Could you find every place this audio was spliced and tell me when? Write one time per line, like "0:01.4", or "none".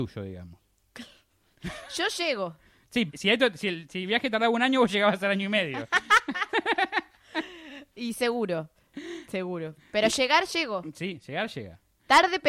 0:03.1